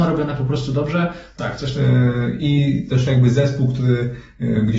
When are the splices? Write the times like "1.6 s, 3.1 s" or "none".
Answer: 1.4 s